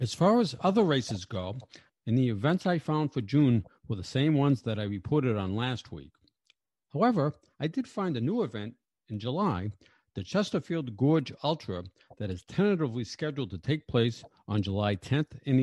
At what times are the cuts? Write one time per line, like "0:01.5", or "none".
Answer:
0:01.9